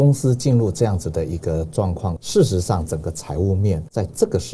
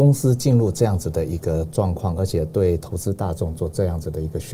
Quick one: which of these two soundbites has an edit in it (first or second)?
first